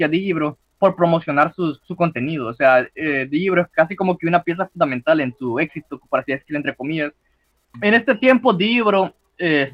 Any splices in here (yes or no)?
yes